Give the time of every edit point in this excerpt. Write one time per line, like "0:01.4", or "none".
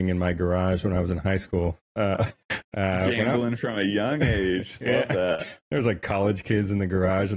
0:02.4